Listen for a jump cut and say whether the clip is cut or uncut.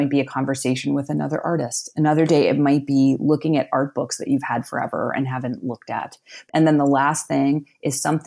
cut